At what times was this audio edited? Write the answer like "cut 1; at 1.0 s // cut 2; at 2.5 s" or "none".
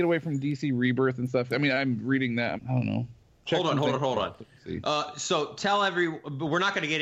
cut 1; at 2.6 s